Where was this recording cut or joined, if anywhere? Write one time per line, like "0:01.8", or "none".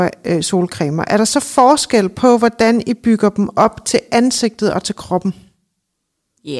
none